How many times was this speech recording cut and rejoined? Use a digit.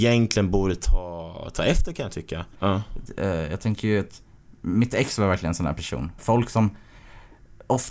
2